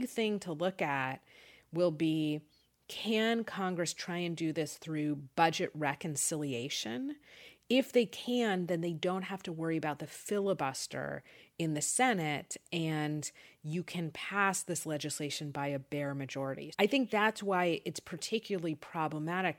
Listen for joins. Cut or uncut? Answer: cut